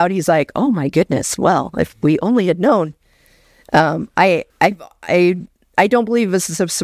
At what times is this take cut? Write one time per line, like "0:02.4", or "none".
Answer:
0:04.5